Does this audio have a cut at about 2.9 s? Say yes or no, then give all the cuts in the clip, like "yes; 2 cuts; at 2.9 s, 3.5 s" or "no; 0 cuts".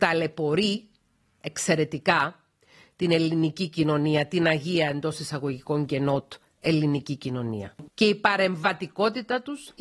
no; 1 cut; at 7.9 s